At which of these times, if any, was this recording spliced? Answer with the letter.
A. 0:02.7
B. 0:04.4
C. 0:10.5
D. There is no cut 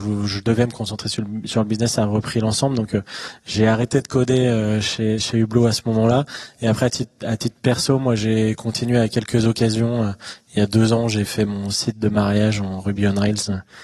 D